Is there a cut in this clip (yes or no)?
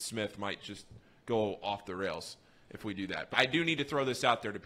yes